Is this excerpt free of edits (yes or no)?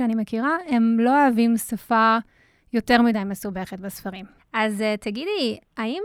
no